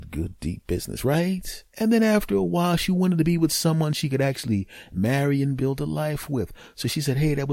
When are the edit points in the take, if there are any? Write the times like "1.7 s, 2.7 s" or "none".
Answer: 1.7 s, 5.6 s